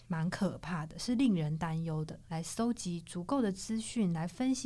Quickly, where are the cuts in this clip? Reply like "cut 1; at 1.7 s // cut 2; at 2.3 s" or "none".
cut 1; at 2.3 s